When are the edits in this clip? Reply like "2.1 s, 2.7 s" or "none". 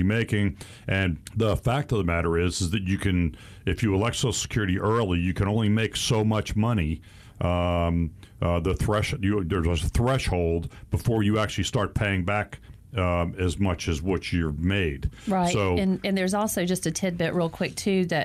none